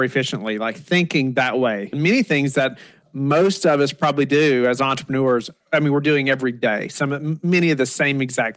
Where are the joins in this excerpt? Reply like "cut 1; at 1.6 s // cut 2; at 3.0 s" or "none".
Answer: cut 1; at 1.9 s